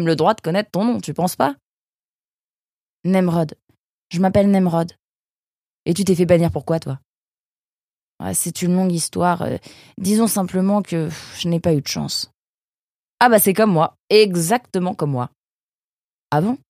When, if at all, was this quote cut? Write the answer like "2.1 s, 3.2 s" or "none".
5.7 s